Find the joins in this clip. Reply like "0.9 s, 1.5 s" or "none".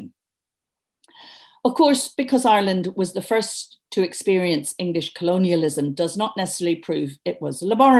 2.1 s